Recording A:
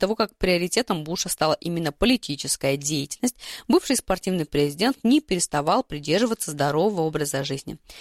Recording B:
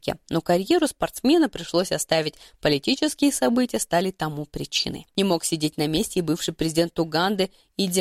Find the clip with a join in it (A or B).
B